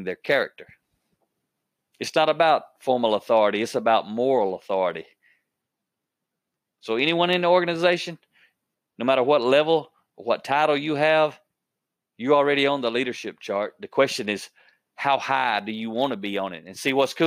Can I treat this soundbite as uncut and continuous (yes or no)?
yes